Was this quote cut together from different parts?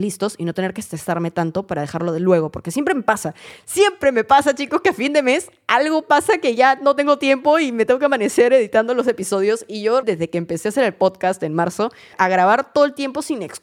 yes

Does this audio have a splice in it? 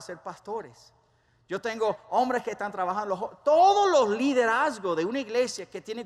no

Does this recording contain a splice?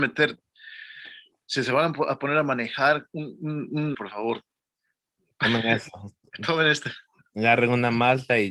yes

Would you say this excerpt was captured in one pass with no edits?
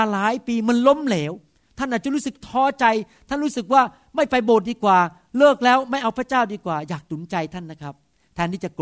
yes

